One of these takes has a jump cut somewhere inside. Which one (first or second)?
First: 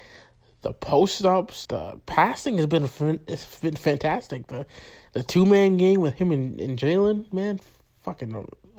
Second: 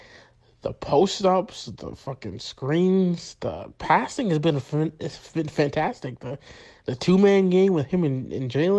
first